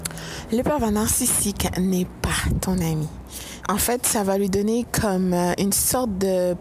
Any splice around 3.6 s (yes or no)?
yes